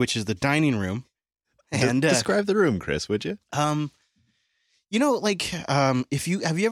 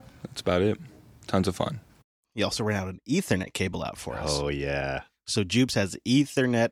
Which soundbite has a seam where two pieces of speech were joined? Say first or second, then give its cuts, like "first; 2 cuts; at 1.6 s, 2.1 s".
second; 1 cut; at 2.2 s